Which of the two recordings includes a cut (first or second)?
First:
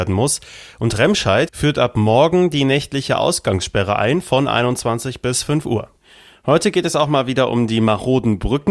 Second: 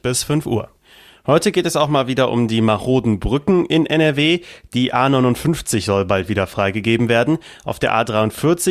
first